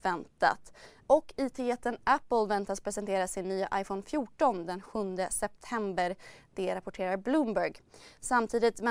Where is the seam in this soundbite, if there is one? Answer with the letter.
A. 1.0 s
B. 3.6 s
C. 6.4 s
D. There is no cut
A